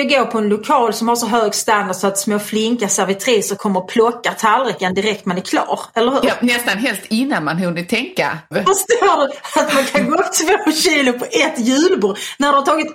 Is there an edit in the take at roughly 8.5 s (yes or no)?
yes